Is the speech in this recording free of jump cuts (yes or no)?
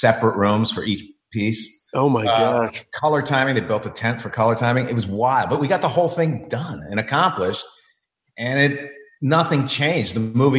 yes